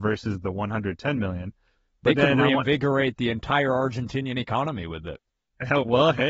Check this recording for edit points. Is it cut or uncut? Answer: uncut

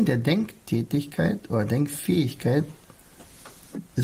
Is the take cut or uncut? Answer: uncut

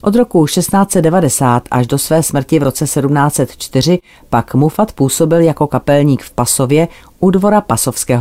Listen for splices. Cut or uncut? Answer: uncut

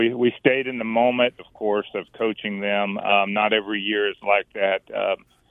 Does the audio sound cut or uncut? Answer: cut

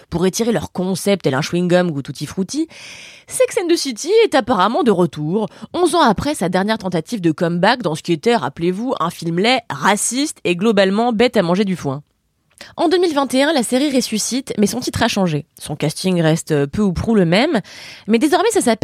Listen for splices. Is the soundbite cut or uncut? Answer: uncut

